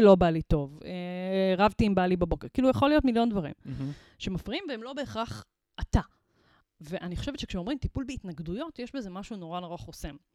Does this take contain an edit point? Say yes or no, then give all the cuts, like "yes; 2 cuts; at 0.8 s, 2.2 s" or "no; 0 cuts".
no; 0 cuts